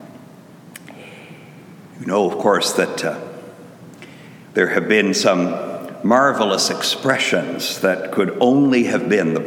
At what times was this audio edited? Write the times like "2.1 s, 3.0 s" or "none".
1.9 s, 4.4 s

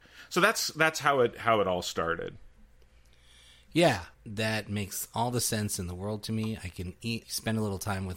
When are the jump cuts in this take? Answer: 4.1 s, 7.2 s

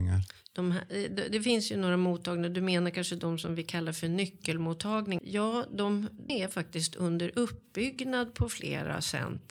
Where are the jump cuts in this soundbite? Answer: 5.2 s, 6.3 s

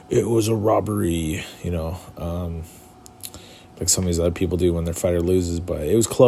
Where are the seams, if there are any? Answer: none

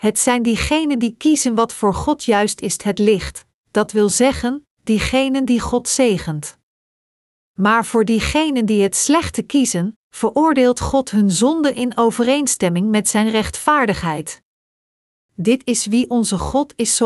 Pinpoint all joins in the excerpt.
none

